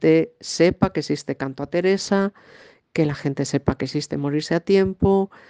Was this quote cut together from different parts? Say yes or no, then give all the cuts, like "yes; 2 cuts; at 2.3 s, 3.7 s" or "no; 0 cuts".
no; 0 cuts